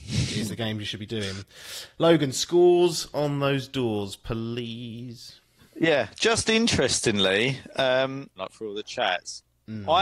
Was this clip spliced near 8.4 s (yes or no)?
yes